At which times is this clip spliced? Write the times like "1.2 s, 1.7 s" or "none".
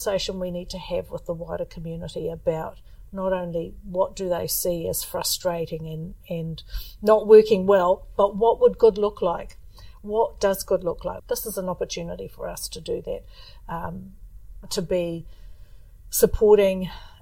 11.2 s, 14.6 s